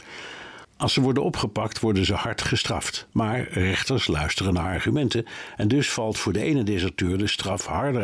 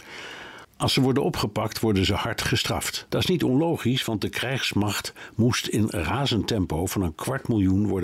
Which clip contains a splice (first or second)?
second